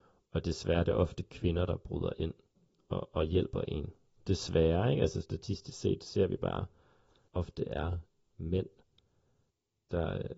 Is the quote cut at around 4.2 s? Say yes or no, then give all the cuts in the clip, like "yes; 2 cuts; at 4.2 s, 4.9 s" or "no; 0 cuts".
yes; 2 cuts; at 4.2 s, 7.3 s